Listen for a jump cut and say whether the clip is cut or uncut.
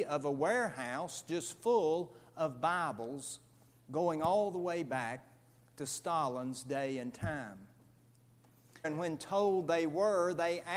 cut